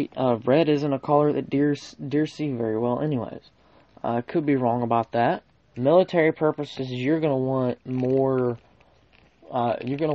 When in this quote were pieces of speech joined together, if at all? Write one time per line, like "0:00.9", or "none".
0:05.7